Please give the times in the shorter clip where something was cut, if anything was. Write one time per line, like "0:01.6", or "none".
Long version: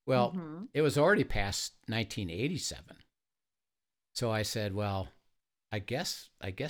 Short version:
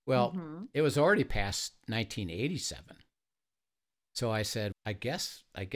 0:04.7